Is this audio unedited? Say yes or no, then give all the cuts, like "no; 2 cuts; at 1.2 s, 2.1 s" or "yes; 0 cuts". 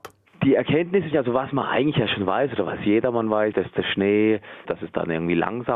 no; 3 cuts; at 1.1 s, 3.5 s, 4.7 s